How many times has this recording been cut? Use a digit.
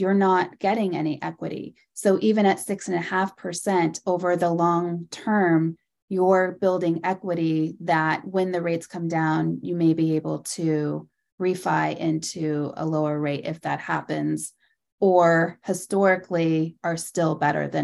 0